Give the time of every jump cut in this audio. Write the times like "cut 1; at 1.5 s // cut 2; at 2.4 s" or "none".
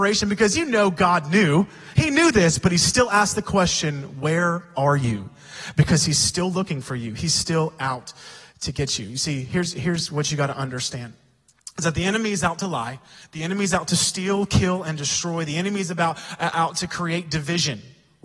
none